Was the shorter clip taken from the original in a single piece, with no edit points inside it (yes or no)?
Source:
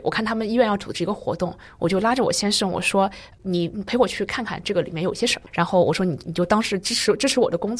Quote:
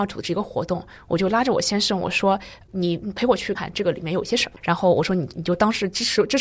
no